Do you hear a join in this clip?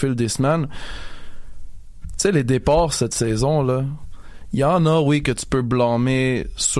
no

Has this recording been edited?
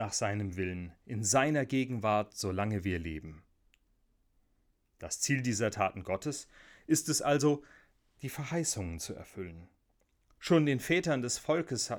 no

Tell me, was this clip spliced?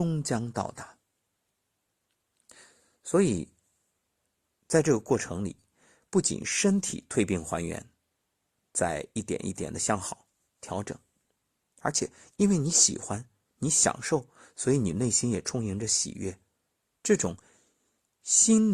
no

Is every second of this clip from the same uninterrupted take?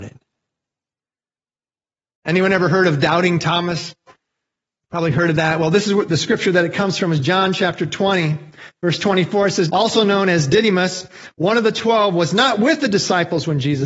no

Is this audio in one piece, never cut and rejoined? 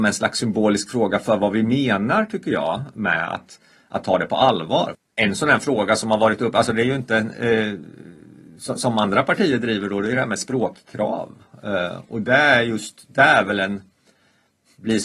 no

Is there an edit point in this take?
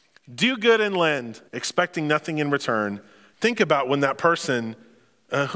yes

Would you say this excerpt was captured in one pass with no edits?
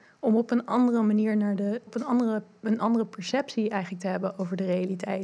no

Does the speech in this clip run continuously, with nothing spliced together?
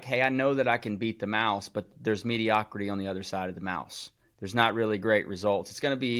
yes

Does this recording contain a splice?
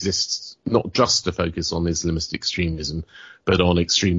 no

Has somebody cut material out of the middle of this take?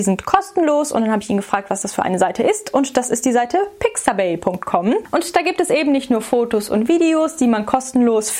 no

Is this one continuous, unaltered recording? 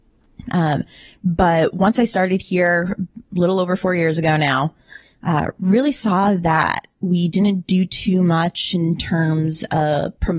yes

